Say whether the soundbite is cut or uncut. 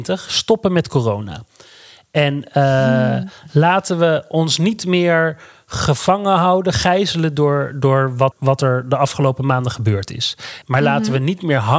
cut